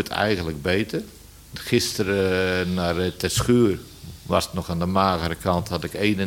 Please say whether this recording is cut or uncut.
uncut